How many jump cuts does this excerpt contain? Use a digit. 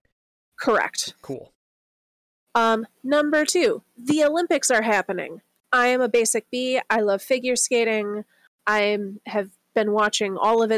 0